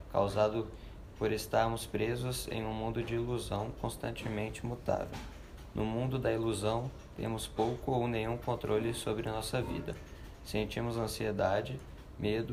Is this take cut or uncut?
uncut